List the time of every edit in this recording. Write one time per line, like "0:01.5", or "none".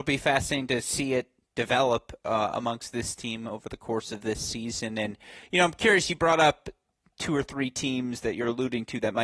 none